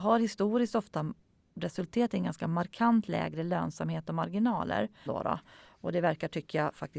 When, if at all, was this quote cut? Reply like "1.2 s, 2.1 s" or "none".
5.1 s